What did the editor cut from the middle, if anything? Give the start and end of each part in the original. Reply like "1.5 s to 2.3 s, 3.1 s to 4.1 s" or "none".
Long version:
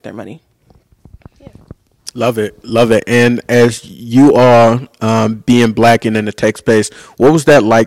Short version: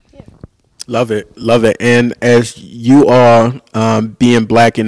none